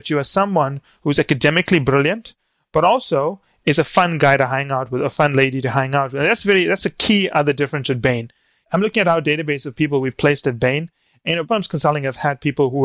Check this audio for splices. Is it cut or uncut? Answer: uncut